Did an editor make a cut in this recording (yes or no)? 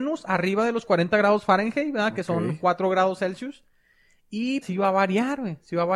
yes